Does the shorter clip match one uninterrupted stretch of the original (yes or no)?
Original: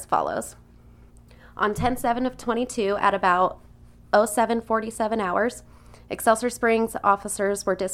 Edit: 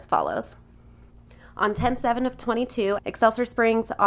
no